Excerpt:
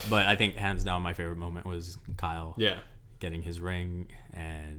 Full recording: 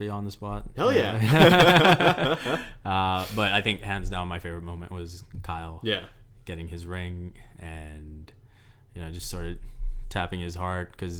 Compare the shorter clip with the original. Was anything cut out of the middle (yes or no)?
no